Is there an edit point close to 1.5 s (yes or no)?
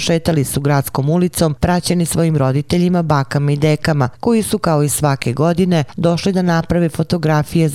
no